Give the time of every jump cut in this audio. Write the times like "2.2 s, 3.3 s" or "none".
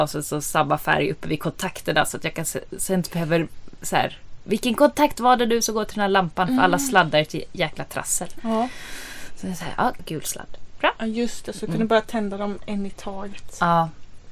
10.0 s